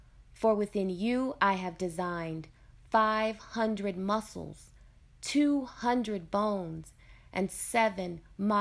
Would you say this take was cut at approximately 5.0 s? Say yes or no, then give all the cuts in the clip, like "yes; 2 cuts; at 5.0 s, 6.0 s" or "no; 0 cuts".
no; 0 cuts